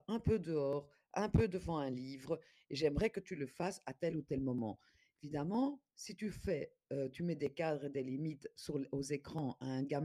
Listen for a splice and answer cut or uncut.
uncut